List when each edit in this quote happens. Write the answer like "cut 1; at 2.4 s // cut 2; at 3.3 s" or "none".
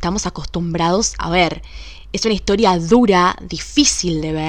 none